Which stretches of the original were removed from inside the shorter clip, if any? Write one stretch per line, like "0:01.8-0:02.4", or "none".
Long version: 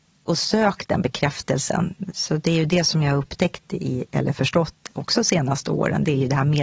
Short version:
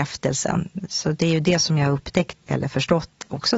0:03.7-0:04.1